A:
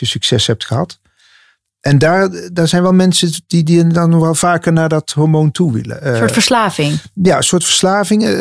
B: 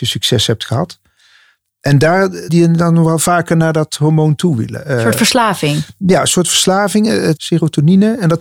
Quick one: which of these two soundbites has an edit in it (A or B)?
B